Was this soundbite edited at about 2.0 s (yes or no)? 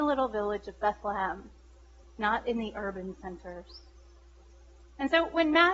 yes